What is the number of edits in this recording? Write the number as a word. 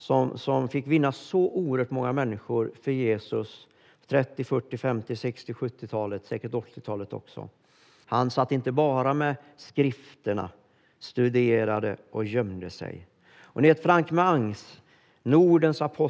one